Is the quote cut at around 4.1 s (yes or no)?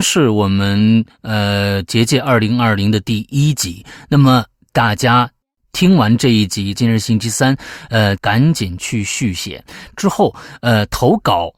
no